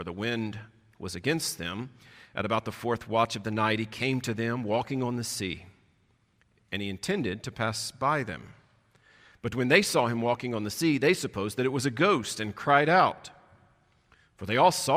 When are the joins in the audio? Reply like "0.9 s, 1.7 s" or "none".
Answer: none